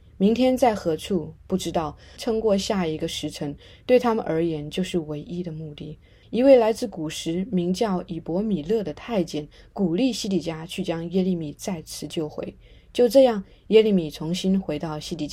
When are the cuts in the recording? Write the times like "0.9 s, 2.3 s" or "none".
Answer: 2.2 s, 6.2 s

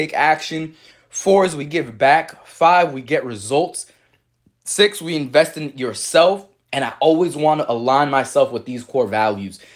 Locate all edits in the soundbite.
6.7 s

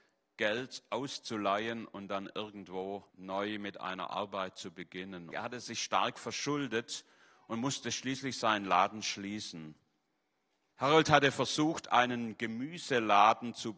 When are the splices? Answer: 3.1 s, 5.3 s, 10.7 s

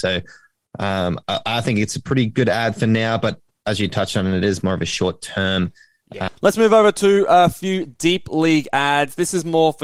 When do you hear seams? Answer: 6.3 s

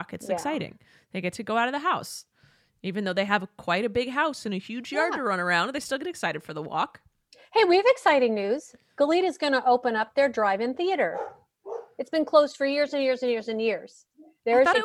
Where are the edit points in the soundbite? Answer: none

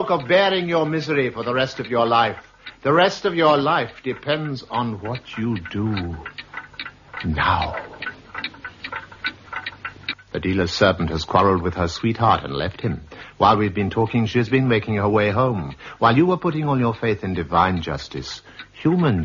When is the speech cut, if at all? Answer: 10.1 s

